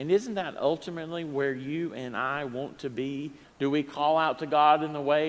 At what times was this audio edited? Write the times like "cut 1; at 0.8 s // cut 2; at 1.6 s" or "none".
cut 1; at 3.4 s